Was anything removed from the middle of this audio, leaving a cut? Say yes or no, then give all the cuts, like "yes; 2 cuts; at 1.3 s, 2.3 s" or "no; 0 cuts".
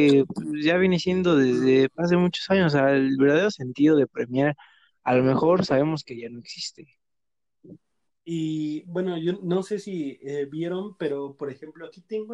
yes; 1 cut; at 8.1 s